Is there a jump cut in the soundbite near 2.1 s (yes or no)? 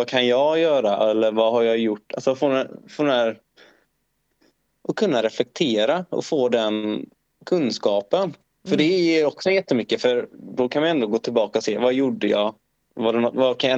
no